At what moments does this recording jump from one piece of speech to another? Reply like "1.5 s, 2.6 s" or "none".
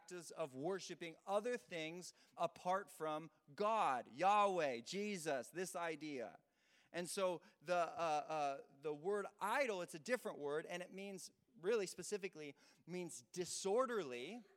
2.4 s